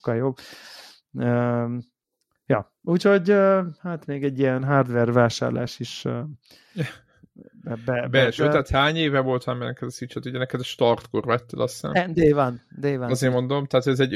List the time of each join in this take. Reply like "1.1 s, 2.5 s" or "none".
8.4 s